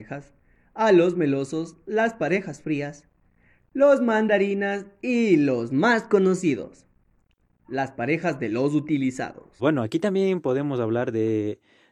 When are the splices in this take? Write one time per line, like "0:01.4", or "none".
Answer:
0:09.6